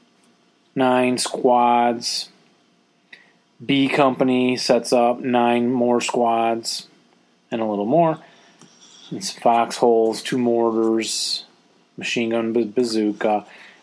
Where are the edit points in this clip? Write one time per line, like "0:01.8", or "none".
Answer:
none